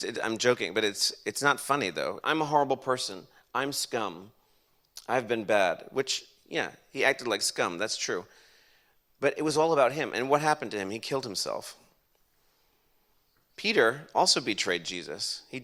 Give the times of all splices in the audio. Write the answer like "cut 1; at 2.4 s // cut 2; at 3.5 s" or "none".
cut 1; at 2.2 s